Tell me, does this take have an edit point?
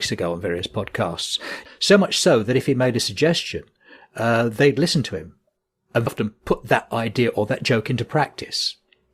yes; 2 cuts; at 1.7 s, 6.1 s

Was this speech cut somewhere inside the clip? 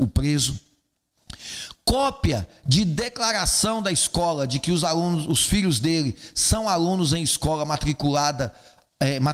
no; 0 cuts

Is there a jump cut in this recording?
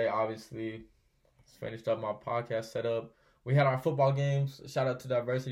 no; 0 cuts

